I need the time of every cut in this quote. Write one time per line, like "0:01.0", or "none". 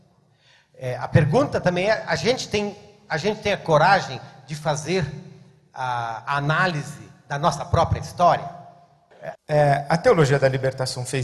0:09.3